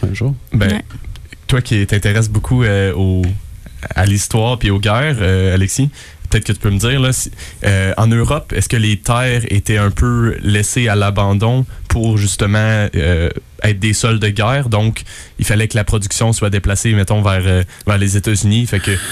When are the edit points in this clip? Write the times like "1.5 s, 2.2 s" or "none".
none